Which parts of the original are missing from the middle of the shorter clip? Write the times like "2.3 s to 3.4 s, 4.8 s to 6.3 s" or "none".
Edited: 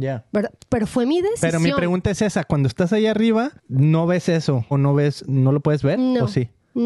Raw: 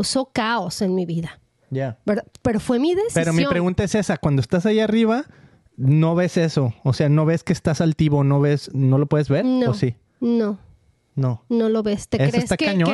5.3 s to 5.7 s, 6.8 s to 8.2 s